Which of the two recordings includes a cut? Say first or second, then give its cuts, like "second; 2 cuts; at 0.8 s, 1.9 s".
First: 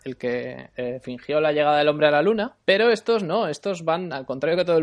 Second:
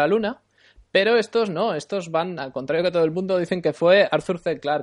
first; 1 cut; at 2.6 s